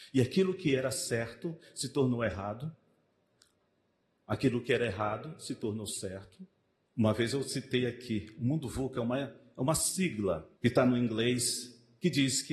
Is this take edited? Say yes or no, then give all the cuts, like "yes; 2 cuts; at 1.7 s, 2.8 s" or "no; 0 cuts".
yes; 2 cuts; at 6.8 s, 10.5 s